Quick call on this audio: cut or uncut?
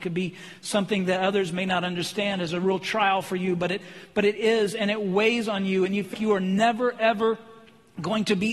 cut